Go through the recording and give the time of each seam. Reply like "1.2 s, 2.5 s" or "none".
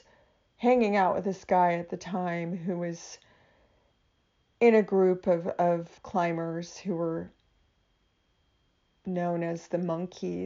6.0 s